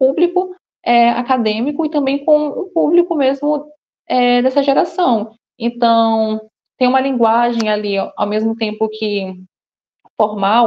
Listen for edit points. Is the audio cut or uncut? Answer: uncut